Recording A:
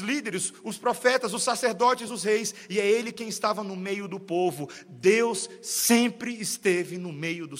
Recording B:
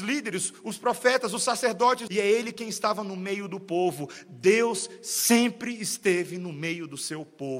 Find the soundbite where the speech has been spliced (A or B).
B